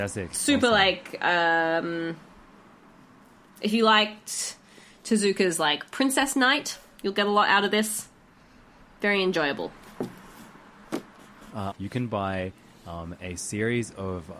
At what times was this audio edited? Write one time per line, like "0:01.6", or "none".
0:11.7